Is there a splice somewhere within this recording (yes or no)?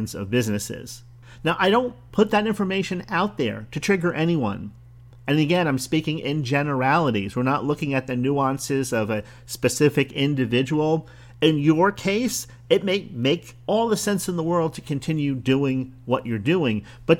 no